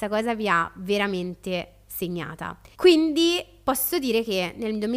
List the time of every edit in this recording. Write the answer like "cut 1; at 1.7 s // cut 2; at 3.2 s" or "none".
cut 1; at 2.7 s